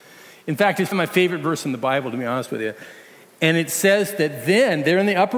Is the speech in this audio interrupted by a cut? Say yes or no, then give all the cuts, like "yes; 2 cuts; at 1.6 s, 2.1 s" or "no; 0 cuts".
yes; 1 cut; at 0.9 s